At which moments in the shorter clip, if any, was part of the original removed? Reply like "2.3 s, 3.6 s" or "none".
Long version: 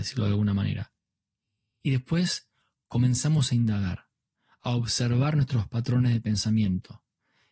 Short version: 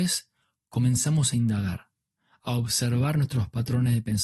none